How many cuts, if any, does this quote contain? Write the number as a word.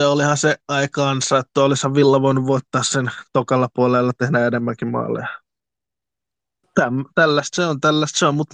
one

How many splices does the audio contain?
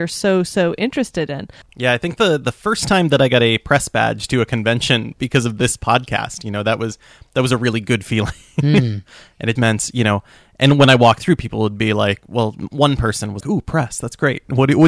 three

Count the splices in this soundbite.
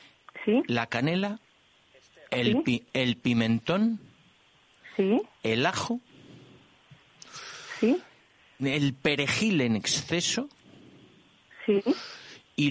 zero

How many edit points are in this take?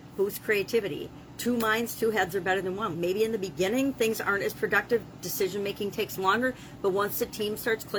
one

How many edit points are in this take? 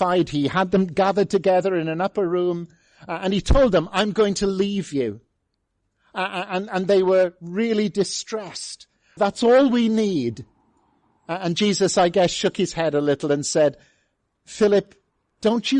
one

